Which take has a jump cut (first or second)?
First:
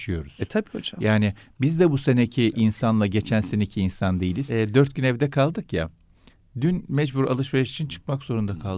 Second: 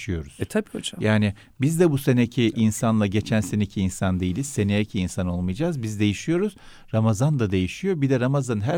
first